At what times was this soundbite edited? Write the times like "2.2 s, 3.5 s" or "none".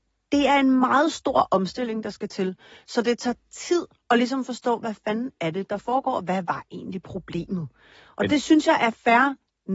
none